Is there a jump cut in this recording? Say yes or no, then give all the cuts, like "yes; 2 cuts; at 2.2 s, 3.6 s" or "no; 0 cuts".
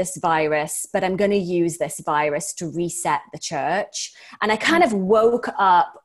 no; 0 cuts